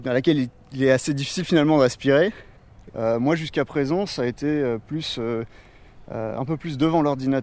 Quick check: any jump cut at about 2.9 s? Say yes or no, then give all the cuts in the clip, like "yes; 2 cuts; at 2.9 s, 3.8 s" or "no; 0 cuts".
yes; 1 cut; at 2.9 s